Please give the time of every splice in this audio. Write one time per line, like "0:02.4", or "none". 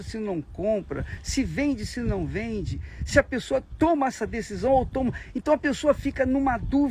none